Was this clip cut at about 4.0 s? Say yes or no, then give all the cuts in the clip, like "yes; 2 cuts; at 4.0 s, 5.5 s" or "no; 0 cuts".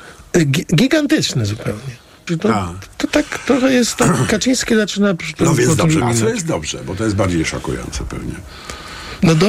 no; 2 cuts; at 2.3 s, 6.0 s